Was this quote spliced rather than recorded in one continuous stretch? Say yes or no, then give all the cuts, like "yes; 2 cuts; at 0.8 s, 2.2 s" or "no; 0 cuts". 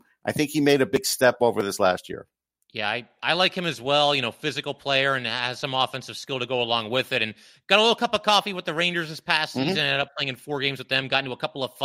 no; 0 cuts